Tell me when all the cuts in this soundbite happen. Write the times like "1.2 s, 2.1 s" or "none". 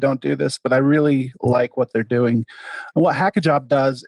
2.9 s